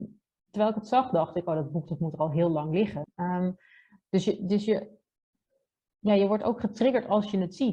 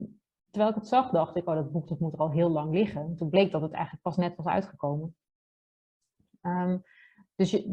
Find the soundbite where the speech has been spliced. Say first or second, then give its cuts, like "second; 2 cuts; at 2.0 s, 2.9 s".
first; 2 cuts; at 3.0 s, 5.9 s